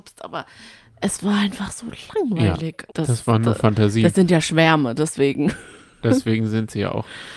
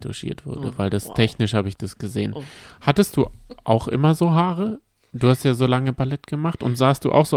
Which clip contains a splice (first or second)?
first